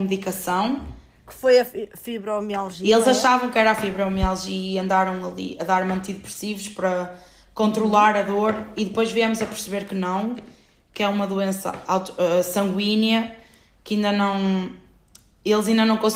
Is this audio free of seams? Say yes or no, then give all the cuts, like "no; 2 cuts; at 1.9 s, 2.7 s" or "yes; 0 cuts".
yes; 0 cuts